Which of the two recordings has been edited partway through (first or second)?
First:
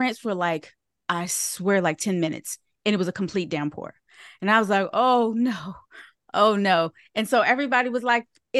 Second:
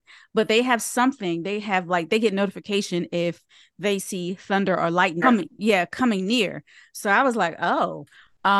second